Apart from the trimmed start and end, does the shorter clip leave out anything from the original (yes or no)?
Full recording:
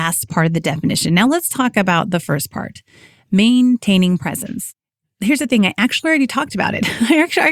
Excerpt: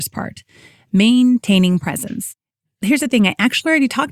no